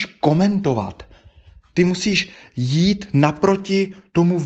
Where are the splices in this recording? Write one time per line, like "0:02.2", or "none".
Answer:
none